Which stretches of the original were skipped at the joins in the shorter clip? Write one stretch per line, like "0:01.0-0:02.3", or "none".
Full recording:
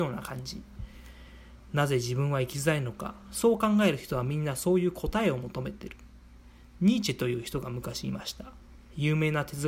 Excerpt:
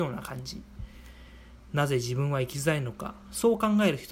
none